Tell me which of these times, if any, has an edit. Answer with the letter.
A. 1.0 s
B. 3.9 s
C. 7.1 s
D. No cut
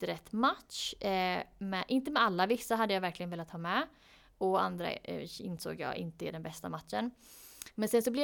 D